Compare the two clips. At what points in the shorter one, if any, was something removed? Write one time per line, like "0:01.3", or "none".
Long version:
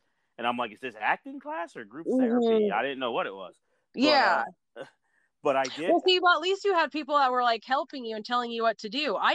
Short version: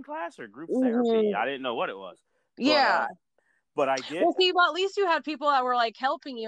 0:03.4